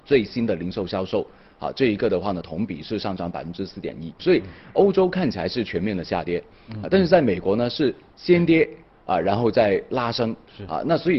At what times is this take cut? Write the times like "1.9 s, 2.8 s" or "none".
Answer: 4.2 s